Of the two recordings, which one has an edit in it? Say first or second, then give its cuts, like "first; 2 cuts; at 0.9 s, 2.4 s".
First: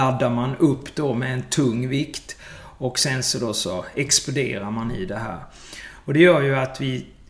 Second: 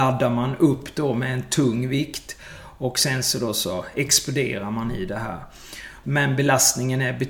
second; 1 cut; at 6.0 s